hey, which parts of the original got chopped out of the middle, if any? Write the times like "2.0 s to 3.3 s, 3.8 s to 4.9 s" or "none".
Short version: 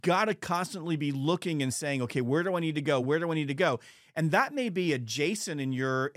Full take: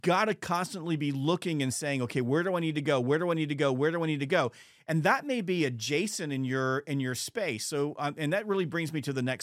3.0 s to 3.7 s